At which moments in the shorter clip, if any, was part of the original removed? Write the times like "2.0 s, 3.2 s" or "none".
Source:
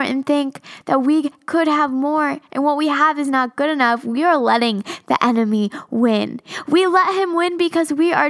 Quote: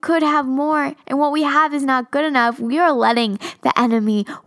none